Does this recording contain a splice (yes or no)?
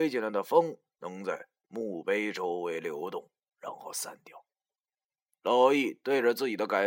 yes